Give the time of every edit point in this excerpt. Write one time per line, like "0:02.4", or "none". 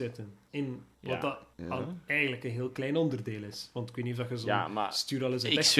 none